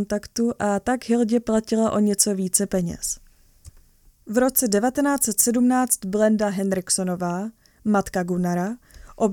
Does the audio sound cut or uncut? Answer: uncut